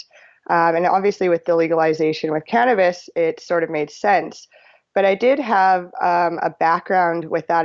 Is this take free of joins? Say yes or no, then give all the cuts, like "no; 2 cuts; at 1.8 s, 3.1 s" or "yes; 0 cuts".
yes; 0 cuts